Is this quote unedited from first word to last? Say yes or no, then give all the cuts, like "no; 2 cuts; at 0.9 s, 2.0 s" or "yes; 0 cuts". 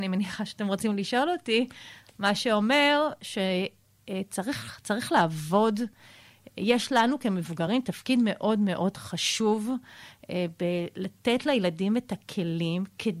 yes; 0 cuts